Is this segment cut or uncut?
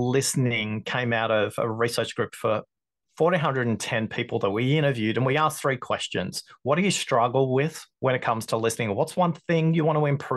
uncut